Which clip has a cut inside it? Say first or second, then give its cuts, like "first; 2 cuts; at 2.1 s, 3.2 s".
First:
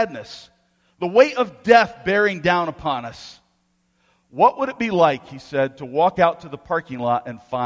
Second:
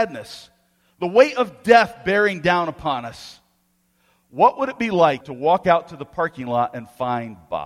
second; 1 cut; at 5.2 s